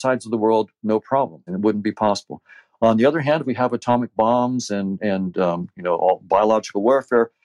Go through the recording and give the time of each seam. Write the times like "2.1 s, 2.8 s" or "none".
1.5 s, 3.4 s